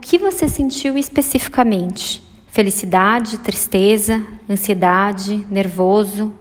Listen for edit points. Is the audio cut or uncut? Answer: uncut